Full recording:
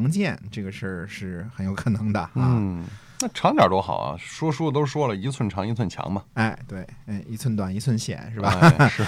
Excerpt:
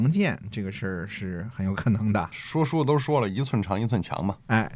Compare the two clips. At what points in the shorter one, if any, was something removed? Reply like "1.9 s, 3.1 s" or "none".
2.3 s